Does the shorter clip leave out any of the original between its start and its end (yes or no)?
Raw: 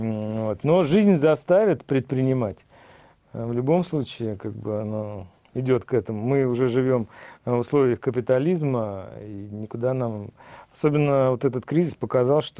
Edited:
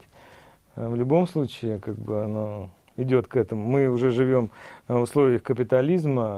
no